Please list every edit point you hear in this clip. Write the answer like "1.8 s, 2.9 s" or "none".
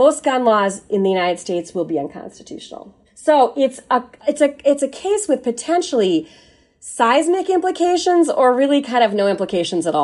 3.0 s